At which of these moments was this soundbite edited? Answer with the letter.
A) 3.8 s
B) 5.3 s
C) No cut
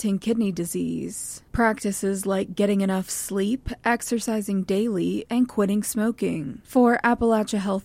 B